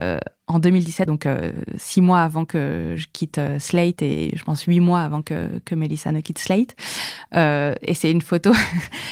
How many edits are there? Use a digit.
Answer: 1